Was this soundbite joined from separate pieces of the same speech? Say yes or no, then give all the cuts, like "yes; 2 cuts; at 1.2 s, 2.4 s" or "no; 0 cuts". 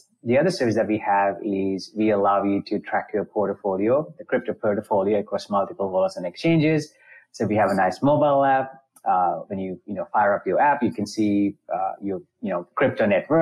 no; 0 cuts